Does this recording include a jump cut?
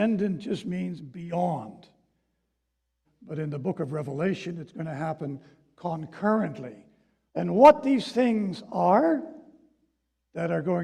yes; 2 cuts; at 3.0 s, 7.3 s

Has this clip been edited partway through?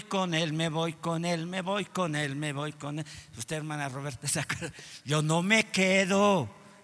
no; 0 cuts

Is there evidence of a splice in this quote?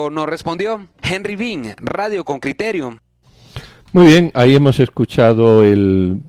no; 0 cuts

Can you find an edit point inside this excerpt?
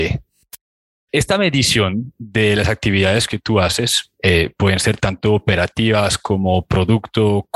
no; 0 cuts

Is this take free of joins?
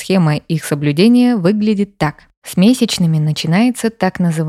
yes; 0 cuts

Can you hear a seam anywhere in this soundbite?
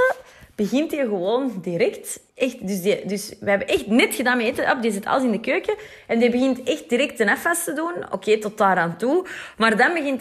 yes; 1 cut; at 2.3 s

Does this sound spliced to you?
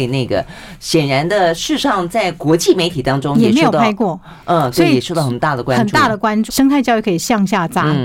yes; 1 cut; at 6.5 s

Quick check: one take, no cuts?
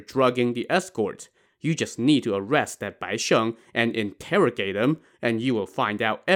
no; 1 cut; at 1.5 s

